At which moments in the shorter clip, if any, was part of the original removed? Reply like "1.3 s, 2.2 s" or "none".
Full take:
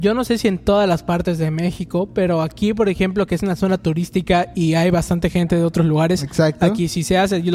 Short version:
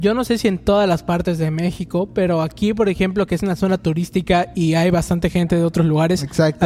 none